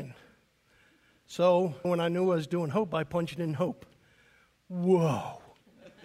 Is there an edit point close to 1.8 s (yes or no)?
yes